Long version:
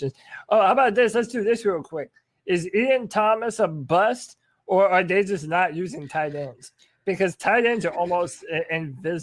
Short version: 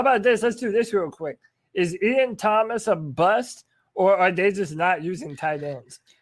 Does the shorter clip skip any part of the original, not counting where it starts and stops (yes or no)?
no